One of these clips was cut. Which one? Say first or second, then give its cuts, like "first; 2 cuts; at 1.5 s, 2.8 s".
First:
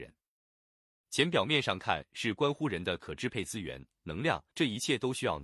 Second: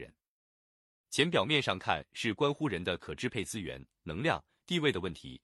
first; 1 cut; at 4.5 s